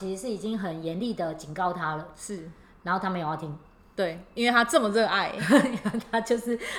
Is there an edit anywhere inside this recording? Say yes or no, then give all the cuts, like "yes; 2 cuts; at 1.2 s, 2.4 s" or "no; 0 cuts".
no; 0 cuts